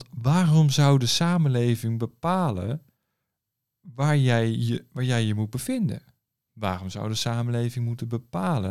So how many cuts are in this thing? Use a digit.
1